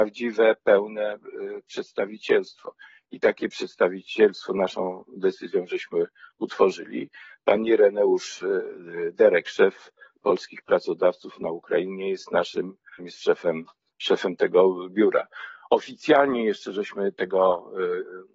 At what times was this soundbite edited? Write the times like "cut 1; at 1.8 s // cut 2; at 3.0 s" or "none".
cut 1; at 13.0 s